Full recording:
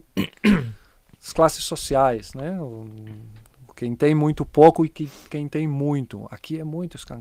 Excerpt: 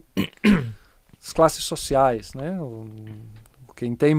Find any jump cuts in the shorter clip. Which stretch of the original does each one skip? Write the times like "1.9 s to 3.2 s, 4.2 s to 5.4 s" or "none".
none